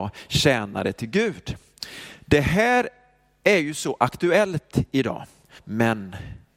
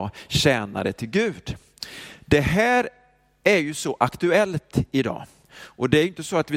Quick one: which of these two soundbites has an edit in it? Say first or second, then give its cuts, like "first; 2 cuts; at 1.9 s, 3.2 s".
first; 1 cut; at 5.6 s